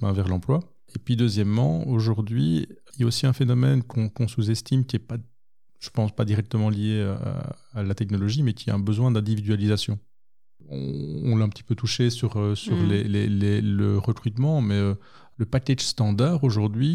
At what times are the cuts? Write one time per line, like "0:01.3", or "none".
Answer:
none